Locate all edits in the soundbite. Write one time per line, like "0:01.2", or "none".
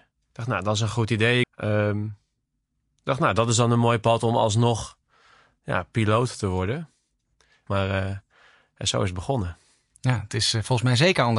0:01.4
0:07.7